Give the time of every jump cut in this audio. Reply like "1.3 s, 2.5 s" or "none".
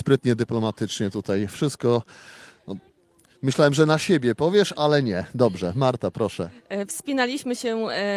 none